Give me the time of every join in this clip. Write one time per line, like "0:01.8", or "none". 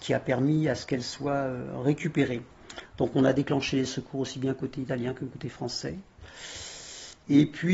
0:02.8